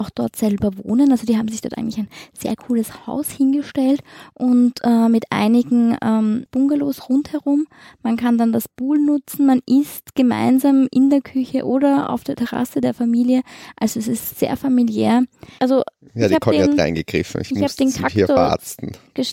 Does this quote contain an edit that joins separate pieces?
yes; 2 cuts; at 6.5 s, 15.6 s

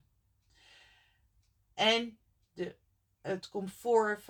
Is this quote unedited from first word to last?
yes; 0 cuts

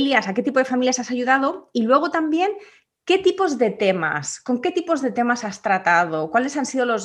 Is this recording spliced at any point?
no; 0 cuts

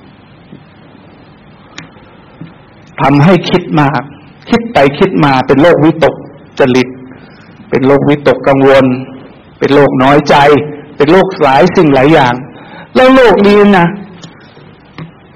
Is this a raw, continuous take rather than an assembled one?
yes; 0 cuts

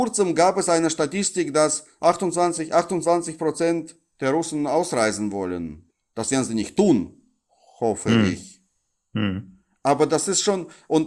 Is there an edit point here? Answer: no; 0 cuts

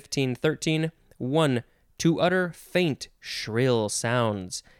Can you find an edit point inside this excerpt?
no; 0 cuts

